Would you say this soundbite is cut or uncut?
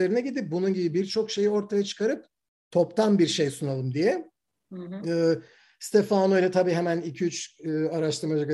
uncut